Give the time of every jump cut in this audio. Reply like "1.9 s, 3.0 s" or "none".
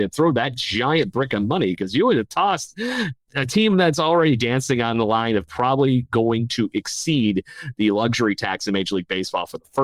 3.2 s